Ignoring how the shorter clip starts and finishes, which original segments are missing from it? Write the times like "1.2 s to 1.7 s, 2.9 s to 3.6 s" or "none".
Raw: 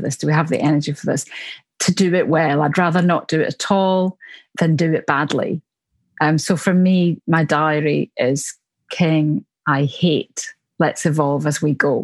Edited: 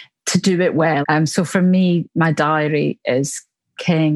2.5 s to 6.1 s